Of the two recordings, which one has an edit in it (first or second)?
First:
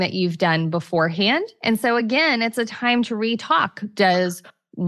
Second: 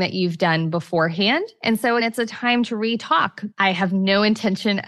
second